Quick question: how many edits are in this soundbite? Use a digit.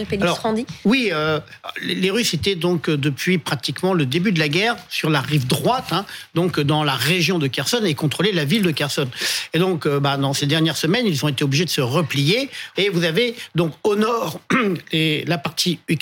1